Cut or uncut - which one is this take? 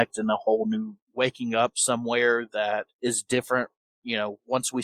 cut